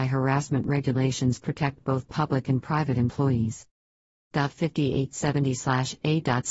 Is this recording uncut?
no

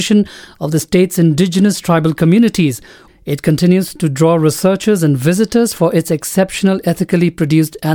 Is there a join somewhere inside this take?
yes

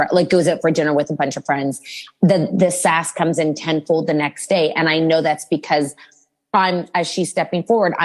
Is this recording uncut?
yes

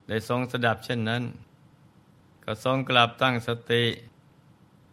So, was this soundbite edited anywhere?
no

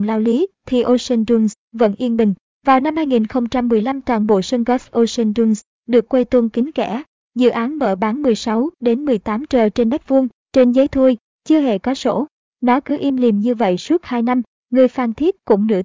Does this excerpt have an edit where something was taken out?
yes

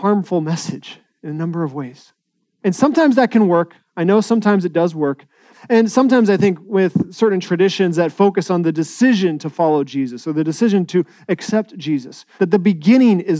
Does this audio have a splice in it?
yes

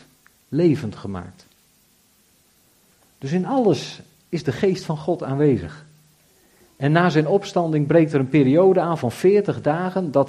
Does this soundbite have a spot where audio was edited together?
no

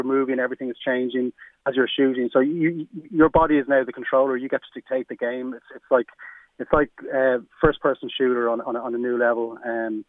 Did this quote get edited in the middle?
no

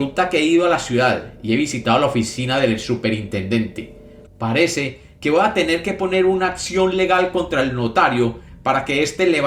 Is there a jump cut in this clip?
yes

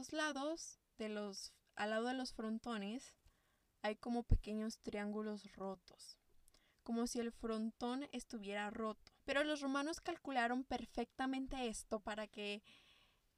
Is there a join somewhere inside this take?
yes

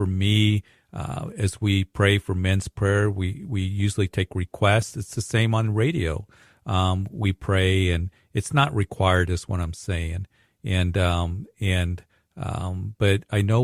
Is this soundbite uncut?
yes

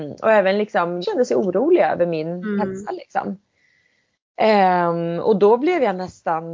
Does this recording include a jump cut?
yes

